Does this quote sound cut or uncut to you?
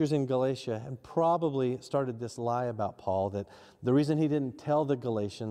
uncut